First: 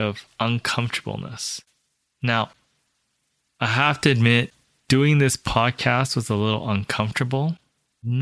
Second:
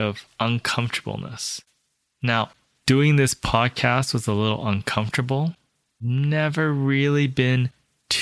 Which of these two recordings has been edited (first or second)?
second